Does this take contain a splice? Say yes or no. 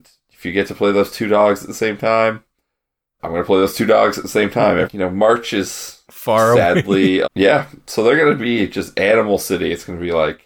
yes